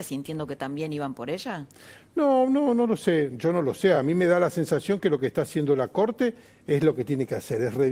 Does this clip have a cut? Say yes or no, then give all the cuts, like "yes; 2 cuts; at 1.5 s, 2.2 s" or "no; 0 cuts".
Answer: no; 0 cuts